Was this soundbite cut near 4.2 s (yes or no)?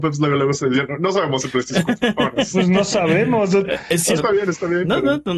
yes